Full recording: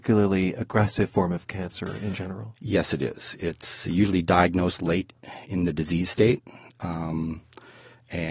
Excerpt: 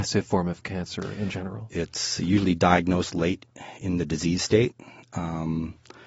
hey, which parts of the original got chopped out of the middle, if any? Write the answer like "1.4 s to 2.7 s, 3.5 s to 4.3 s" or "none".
2.5 s to 3.4 s